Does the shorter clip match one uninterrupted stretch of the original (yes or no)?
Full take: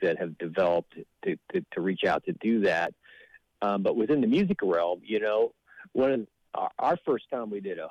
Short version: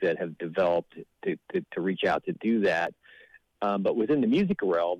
yes